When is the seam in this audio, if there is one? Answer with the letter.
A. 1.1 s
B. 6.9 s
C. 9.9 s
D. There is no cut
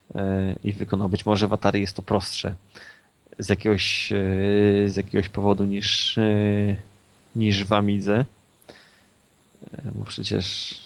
D